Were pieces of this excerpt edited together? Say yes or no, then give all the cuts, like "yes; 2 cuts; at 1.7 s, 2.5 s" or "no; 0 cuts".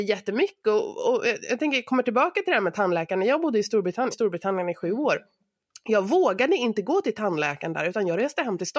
yes; 1 cut; at 4.1 s